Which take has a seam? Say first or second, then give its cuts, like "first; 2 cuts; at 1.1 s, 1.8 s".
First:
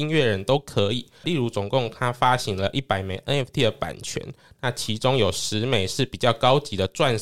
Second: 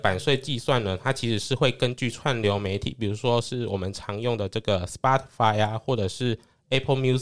first; 1 cut; at 1.2 s